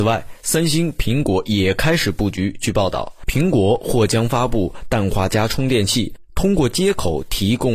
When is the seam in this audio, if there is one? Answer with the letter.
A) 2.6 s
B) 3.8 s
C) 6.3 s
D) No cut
D